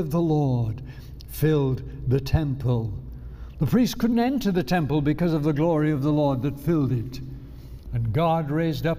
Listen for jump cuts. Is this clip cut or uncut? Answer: cut